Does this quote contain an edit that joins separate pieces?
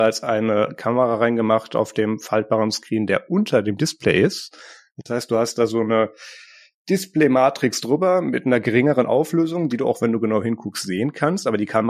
no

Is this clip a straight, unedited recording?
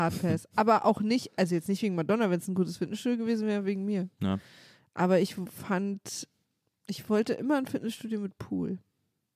yes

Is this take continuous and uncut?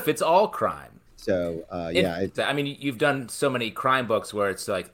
no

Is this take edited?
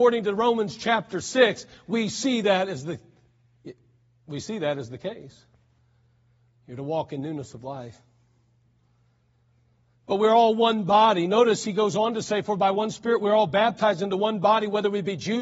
no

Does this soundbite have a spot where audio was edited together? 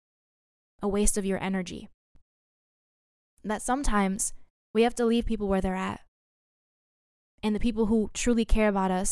yes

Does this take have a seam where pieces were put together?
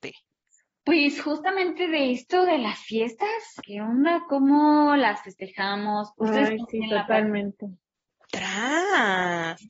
yes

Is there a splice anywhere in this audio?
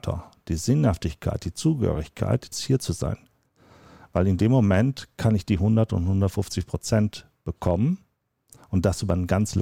yes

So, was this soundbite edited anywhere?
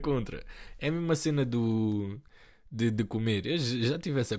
no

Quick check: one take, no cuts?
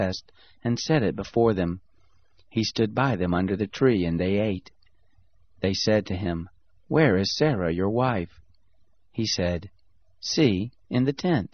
yes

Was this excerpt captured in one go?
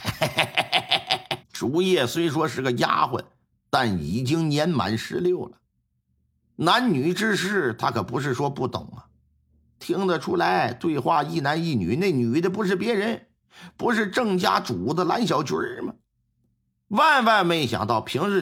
no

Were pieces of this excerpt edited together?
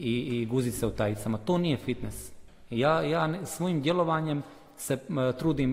no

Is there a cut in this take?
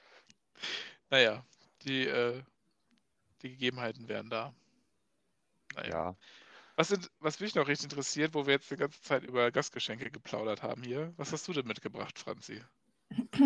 no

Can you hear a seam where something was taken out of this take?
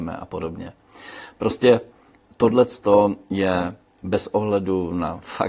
no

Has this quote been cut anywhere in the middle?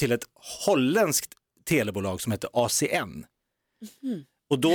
no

